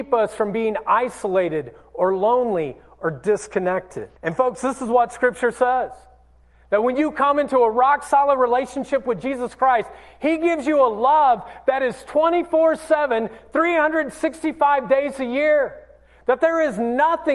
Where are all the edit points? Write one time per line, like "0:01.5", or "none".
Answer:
0:04.2